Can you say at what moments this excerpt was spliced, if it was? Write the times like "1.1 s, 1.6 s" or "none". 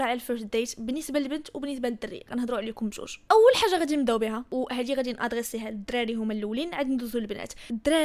none